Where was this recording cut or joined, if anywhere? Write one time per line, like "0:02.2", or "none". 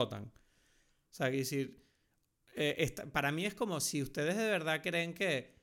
0:01.1